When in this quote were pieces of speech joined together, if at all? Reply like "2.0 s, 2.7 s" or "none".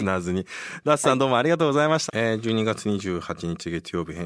2.1 s